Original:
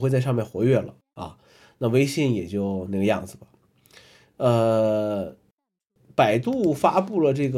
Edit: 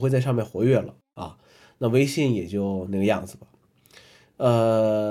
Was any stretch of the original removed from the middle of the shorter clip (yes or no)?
no